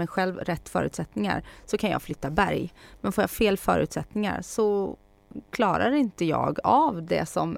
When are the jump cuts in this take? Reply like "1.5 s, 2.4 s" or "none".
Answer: none